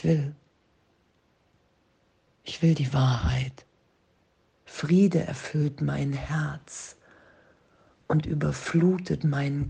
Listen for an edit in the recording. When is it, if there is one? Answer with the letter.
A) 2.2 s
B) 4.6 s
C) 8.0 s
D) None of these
B